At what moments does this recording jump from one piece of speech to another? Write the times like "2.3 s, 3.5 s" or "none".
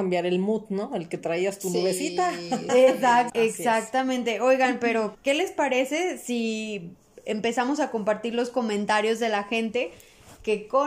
3.3 s, 5.1 s